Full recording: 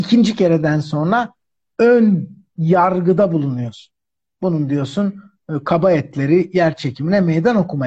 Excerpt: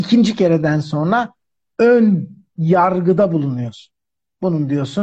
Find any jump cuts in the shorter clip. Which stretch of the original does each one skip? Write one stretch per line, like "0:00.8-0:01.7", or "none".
none